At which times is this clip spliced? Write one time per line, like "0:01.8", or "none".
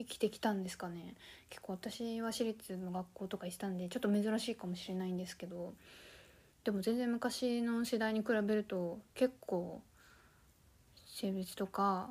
0:06.5
0:09.1

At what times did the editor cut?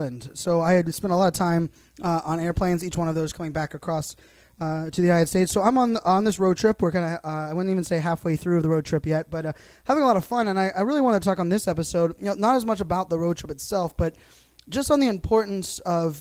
none

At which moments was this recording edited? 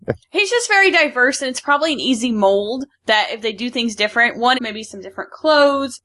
0:04.5

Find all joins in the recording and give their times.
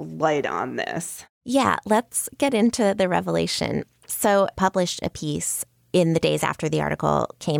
0:04.5

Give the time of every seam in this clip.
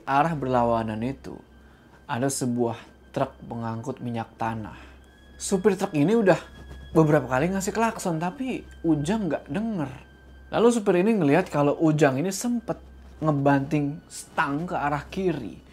none

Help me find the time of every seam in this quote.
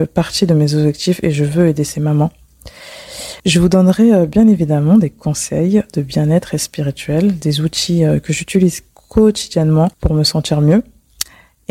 0:03.4
0:09.9

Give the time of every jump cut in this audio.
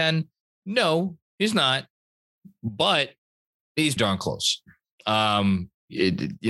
0:04.0

